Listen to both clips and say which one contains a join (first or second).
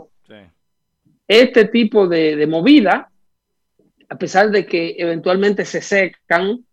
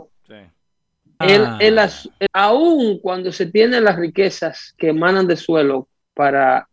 second